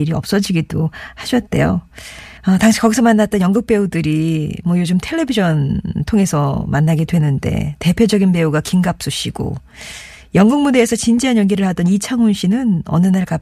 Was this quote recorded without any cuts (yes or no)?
no